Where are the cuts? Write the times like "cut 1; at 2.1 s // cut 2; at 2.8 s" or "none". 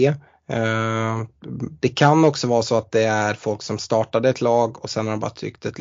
cut 1; at 1.8 s